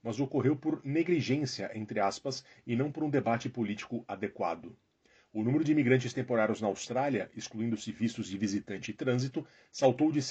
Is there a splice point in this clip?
no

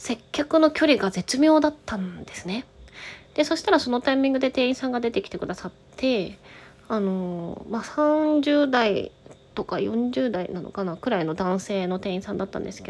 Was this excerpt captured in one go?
no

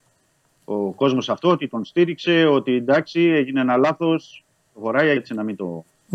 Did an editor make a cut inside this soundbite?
yes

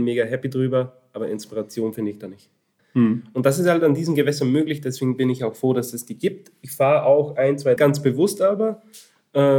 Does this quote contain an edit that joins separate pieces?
yes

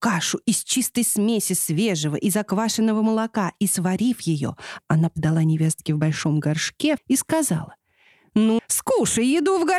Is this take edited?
yes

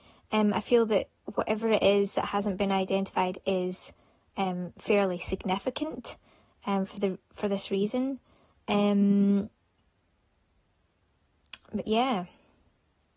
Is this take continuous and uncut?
yes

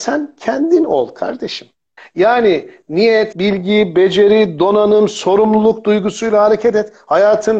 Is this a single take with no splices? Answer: no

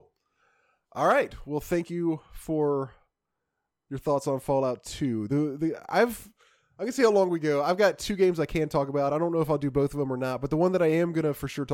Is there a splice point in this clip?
no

